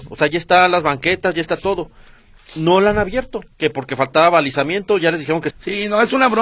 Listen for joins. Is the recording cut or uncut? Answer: cut